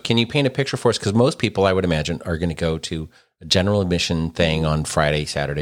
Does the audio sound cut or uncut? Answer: uncut